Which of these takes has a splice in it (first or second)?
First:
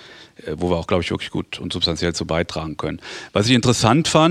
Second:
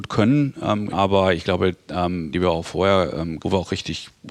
second